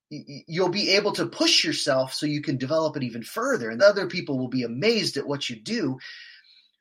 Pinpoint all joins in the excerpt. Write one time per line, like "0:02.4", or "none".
0:03.8